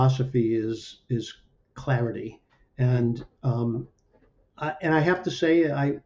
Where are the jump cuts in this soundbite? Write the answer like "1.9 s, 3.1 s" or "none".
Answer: none